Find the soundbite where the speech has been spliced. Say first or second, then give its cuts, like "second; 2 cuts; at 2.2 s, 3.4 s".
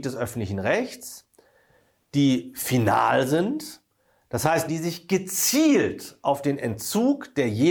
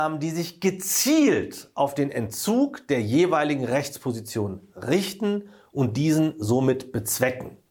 first; 1 cut; at 4.7 s